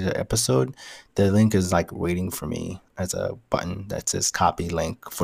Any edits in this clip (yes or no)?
yes